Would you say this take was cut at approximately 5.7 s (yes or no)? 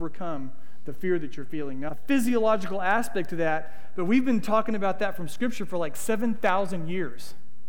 no